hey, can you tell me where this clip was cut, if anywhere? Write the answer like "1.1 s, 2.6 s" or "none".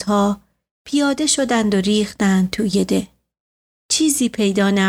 3.8 s